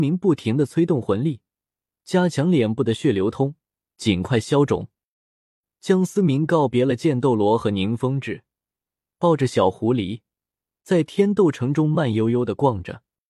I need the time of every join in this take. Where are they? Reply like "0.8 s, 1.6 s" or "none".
none